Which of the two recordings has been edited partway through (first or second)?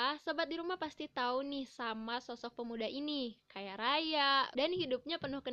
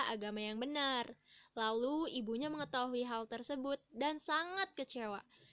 first